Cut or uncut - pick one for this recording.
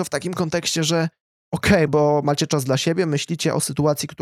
cut